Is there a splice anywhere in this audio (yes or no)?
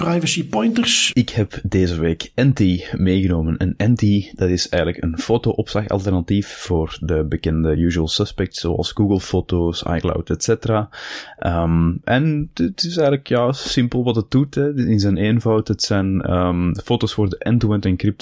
yes